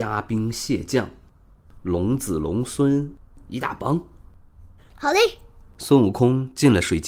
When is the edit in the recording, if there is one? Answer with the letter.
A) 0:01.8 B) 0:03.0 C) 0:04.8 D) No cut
C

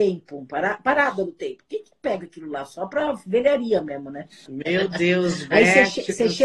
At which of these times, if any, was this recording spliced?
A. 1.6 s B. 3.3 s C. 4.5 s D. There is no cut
C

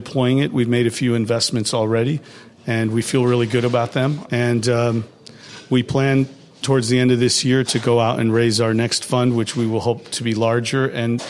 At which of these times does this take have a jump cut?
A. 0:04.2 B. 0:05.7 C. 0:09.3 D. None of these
A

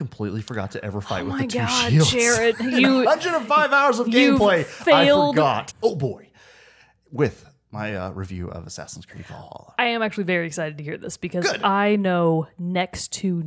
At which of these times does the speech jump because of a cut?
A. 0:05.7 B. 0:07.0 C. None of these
A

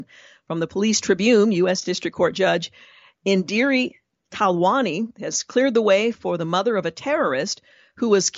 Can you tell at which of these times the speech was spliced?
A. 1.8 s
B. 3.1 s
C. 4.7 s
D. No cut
D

